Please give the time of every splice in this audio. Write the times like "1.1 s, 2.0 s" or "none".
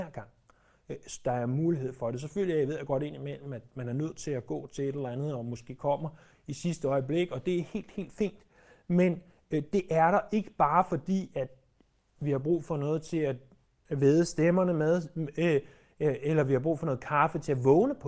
none